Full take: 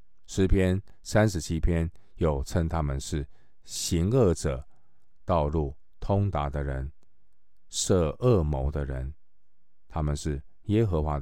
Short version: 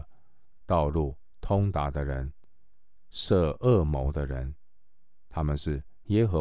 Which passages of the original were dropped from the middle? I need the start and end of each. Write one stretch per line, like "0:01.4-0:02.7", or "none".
none